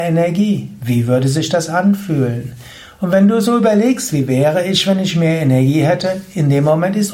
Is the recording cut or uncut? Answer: uncut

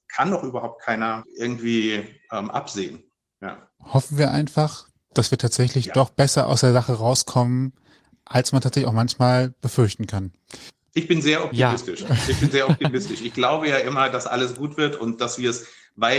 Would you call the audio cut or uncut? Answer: uncut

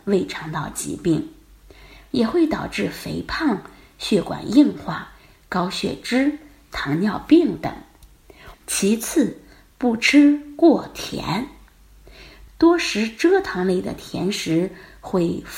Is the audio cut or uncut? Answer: cut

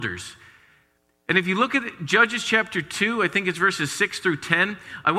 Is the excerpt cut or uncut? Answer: uncut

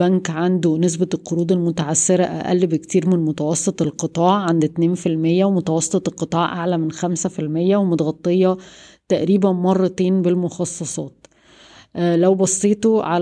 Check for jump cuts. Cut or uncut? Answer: uncut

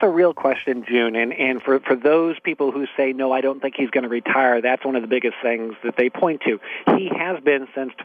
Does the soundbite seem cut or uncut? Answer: uncut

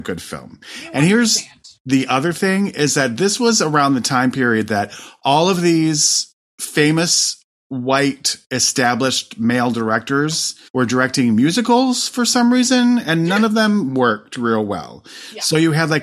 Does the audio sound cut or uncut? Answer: cut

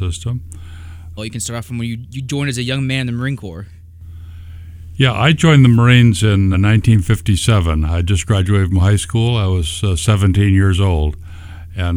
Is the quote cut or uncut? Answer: cut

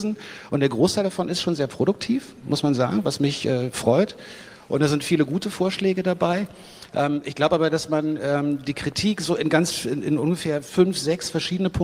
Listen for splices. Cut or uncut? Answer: uncut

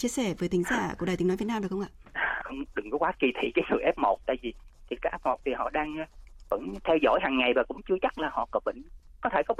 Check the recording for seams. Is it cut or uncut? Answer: cut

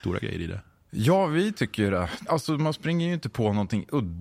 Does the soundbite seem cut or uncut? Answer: uncut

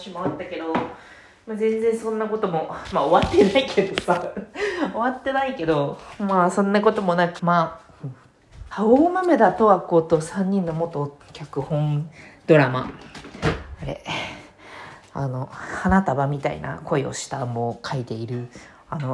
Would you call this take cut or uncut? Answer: cut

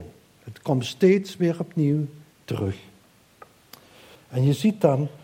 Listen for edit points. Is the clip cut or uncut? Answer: cut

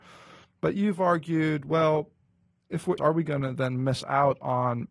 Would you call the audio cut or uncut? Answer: cut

